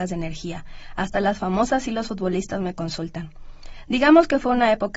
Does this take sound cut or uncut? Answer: uncut